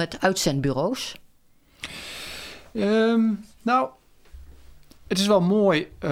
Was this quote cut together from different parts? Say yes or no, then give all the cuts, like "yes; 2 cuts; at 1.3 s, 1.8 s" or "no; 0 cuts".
no; 0 cuts